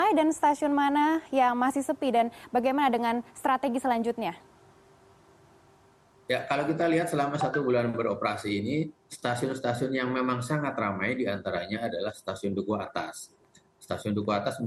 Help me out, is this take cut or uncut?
uncut